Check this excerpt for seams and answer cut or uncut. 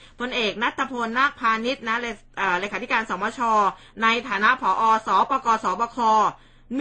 uncut